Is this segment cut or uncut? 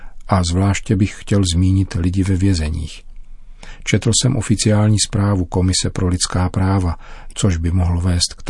cut